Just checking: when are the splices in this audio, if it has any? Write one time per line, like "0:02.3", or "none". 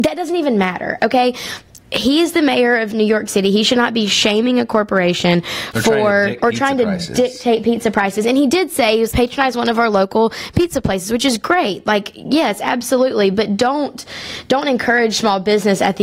0:06.4
0:09.1